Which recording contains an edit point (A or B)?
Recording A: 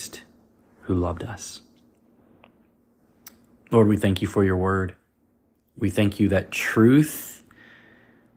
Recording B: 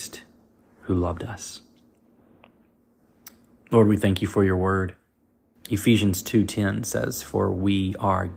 B